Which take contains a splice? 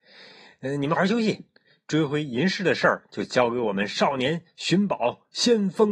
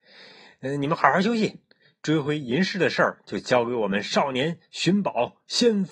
first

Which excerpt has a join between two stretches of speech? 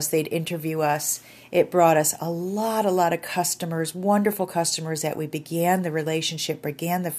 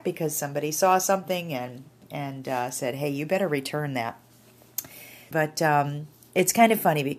second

